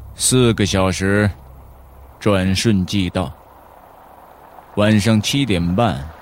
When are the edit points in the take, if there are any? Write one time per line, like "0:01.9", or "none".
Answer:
0:02.1